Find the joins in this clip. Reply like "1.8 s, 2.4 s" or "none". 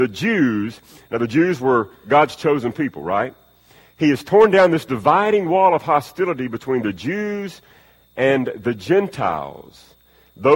none